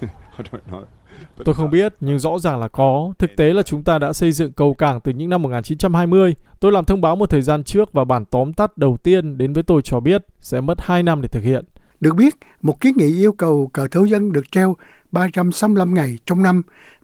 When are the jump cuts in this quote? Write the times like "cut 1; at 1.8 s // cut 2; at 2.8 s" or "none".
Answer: cut 1; at 6.5 s // cut 2; at 11.9 s